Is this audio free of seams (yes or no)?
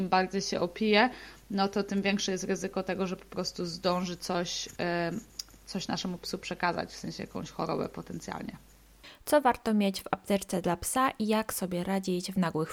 yes